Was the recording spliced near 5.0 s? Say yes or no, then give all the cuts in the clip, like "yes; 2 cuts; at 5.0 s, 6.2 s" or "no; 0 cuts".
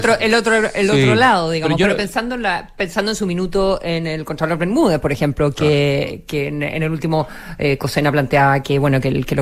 no; 0 cuts